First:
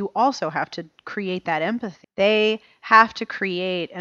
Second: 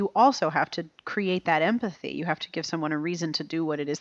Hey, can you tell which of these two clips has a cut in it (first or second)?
first